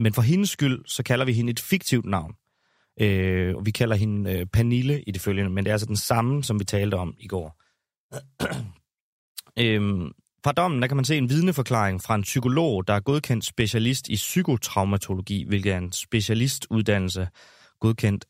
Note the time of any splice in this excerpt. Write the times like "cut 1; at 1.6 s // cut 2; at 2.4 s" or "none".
none

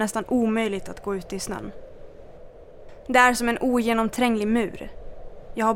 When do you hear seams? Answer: none

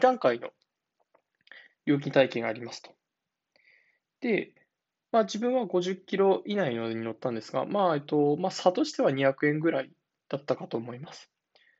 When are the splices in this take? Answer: none

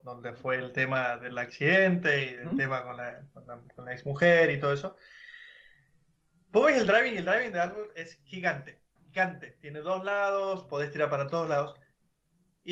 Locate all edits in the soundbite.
cut 1; at 9.0 s

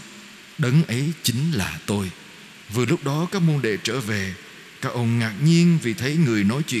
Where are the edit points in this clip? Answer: cut 1; at 2.6 s

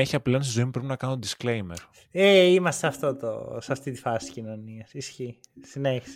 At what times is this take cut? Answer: none

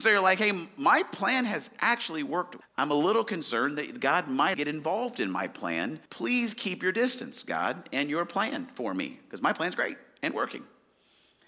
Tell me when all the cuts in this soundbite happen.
cut 1; at 2.6 s // cut 2; at 4.5 s // cut 3; at 6.1 s

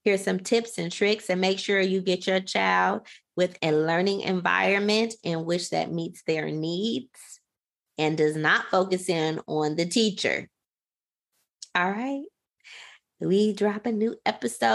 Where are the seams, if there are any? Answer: none

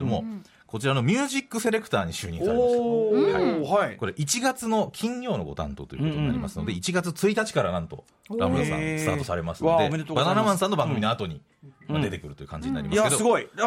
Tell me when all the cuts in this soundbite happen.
none

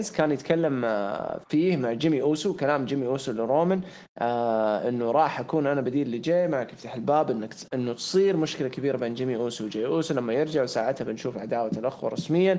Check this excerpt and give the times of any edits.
none

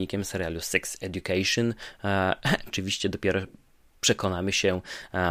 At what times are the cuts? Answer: cut 1; at 2.7 s

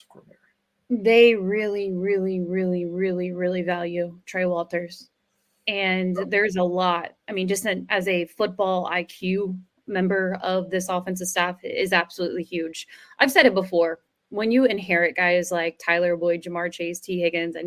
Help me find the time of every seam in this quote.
none

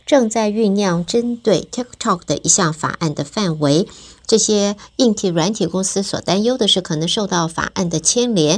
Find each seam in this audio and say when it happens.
none

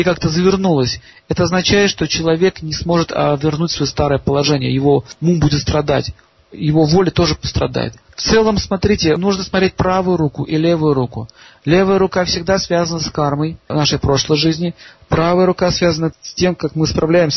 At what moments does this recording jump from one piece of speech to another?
none

